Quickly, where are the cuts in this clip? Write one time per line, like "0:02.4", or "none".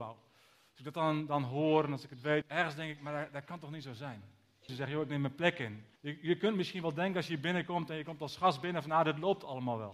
0:02.4
0:04.7
0:06.0